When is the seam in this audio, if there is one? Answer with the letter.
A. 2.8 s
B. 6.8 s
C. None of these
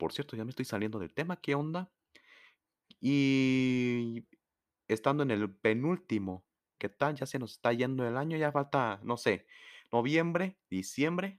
B